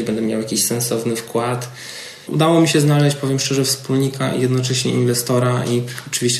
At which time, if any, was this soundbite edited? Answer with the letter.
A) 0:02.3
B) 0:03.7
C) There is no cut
A